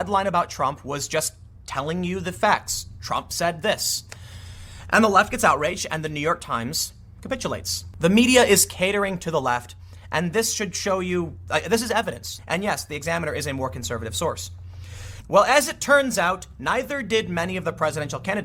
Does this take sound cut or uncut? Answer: cut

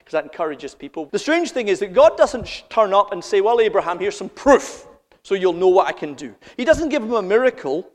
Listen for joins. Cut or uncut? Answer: cut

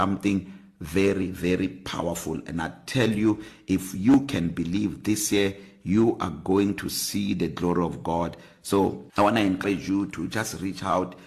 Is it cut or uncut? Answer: cut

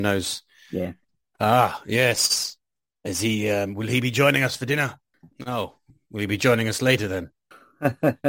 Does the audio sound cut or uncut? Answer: cut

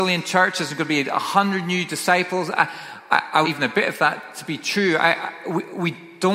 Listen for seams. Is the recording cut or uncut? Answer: cut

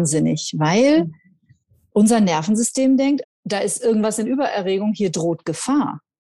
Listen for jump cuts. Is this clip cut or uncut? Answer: cut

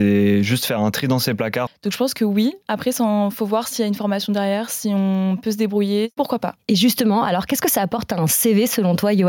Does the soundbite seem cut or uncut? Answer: cut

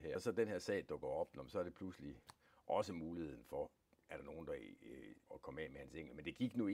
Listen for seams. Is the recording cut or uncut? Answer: cut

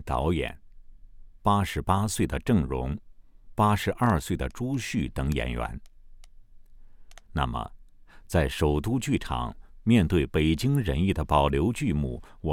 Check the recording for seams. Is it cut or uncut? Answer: cut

